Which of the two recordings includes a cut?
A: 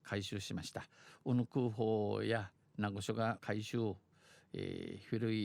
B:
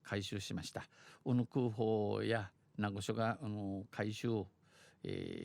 A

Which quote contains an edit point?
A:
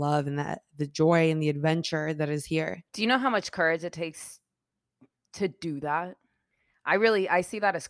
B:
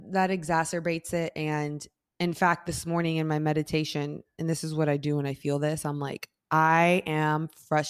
A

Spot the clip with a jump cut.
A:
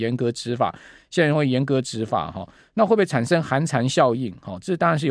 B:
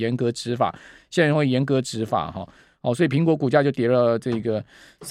B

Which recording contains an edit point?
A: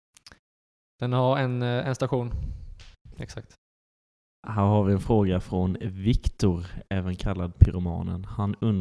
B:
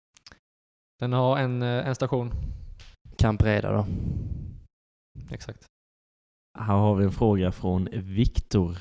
A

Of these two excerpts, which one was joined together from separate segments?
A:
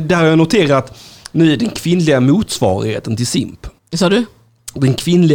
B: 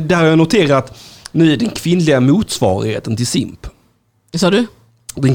A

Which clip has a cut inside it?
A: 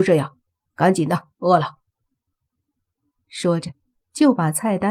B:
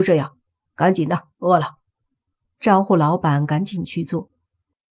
B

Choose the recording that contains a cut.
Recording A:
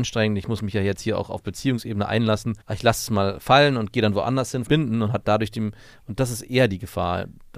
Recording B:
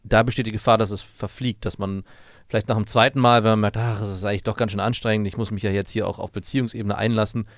A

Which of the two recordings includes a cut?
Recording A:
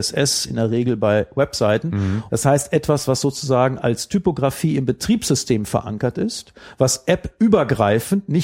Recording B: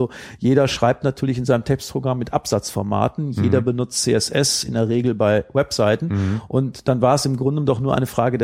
A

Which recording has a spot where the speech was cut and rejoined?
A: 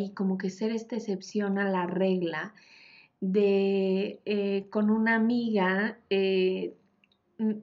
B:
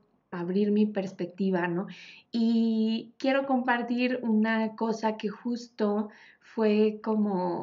B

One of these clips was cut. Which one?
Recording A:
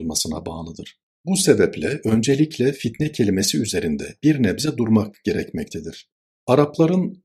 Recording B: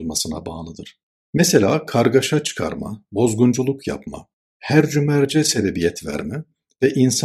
B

